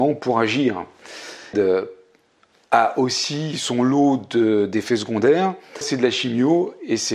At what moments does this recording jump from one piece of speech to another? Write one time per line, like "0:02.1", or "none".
0:01.5
0:05.8